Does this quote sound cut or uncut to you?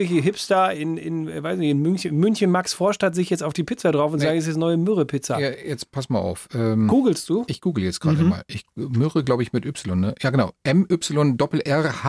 uncut